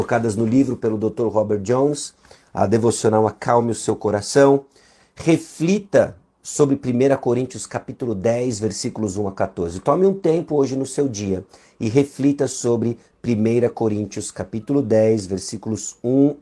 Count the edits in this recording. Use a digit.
0